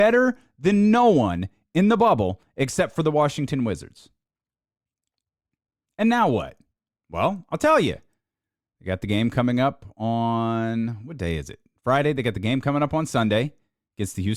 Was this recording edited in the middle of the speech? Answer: no; 0 cuts

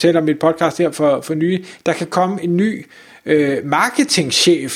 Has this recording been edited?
no; 0 cuts

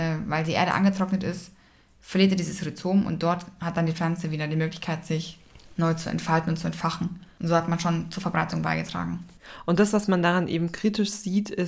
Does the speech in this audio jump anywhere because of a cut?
no; 0 cuts

